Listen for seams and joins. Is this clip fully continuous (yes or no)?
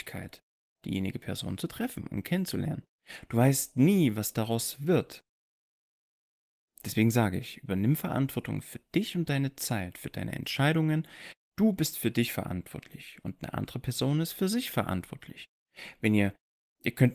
yes